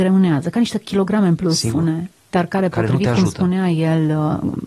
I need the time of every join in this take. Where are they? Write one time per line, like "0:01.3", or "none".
0:01.7